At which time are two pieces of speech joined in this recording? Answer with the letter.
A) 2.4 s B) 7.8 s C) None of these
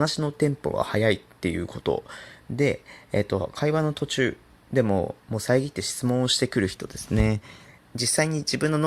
B